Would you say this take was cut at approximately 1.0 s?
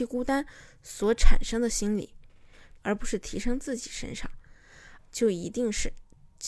no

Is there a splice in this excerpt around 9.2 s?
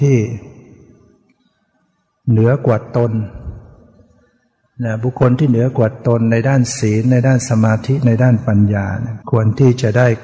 yes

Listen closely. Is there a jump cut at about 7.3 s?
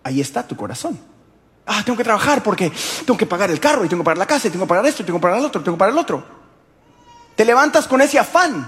no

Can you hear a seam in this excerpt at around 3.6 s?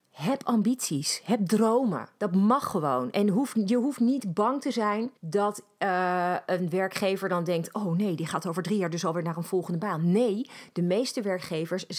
no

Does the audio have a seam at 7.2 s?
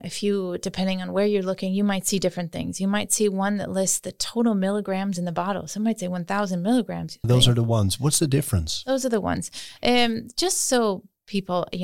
yes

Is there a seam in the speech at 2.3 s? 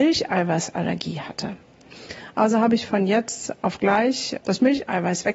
no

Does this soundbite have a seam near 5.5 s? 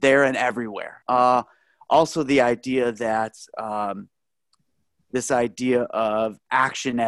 no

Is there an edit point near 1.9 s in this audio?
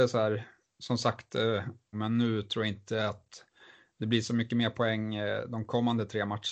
yes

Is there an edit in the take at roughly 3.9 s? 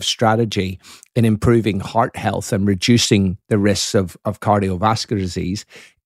no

